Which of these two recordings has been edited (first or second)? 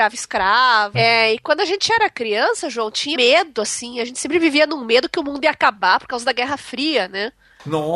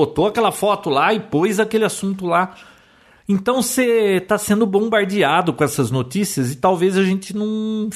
first